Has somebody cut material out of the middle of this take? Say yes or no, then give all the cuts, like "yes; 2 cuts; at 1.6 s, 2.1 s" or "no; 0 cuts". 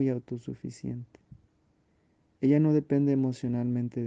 no; 0 cuts